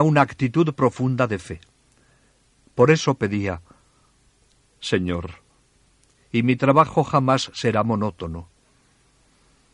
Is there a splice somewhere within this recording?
yes; 1 cut; at 6.2 s

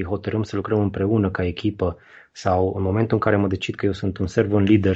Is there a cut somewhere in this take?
no; 0 cuts

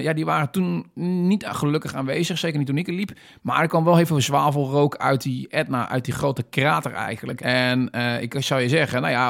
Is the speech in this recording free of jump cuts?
no; 1 cut; at 7.4 s

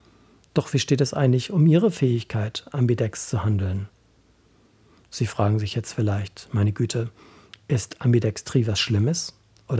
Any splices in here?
no; 0 cuts

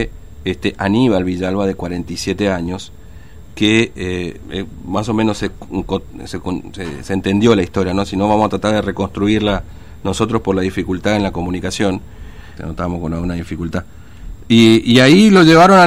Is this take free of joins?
no; 3 cuts; at 4.4 s, 12.6 s, 14.4 s

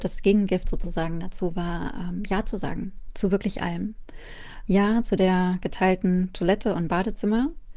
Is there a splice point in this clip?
yes; 1 cut; at 4.7 s

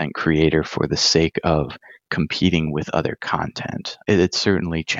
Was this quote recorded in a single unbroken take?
no; 1 cut; at 4.0 s

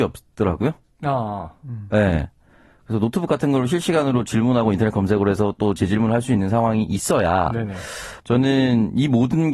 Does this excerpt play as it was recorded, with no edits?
no; 1 cut; at 8.2 s

